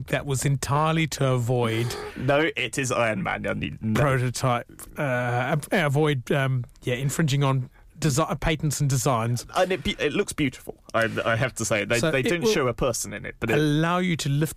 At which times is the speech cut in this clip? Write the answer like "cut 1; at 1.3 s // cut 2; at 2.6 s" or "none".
none

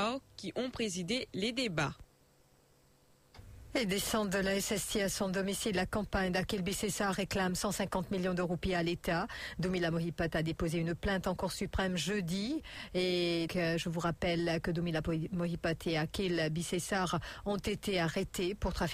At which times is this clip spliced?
cut 1; at 13.5 s

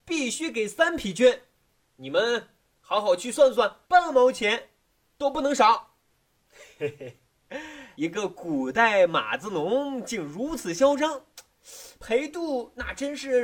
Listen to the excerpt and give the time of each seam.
cut 1; at 3.8 s // cut 2; at 7.9 s

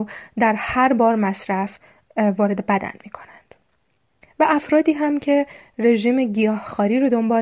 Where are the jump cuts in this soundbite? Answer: cut 1; at 4.2 s

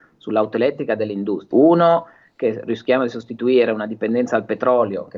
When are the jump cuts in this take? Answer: cut 1; at 1.5 s

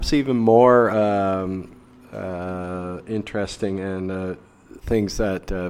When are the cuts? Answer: none

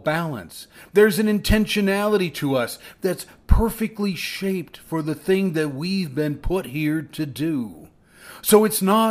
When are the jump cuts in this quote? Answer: none

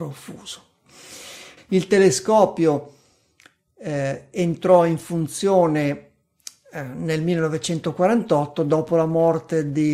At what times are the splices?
cut 1; at 1.6 s

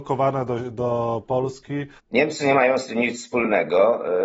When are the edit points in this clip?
cut 1; at 2.0 s

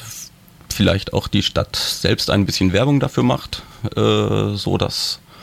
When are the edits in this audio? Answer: none

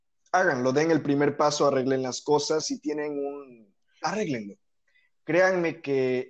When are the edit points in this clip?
cut 1; at 2.6 s // cut 2; at 4.0 s

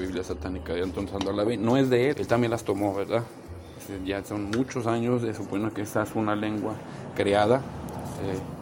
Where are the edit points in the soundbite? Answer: cut 1; at 2.1 s

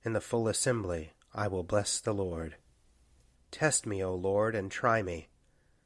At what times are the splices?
cut 1; at 3.3 s

